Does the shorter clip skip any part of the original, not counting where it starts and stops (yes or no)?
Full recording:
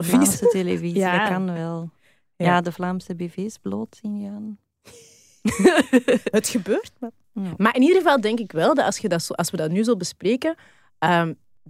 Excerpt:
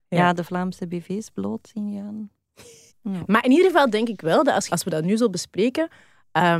yes